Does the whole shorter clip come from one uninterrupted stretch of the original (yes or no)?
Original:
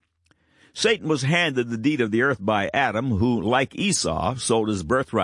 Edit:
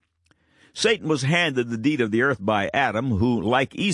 yes